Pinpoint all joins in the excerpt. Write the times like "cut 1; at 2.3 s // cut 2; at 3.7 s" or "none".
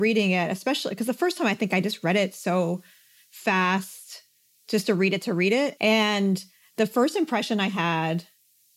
cut 1; at 5.8 s